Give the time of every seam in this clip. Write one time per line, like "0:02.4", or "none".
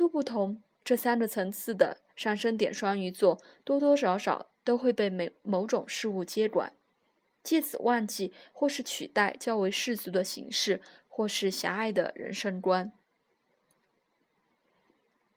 none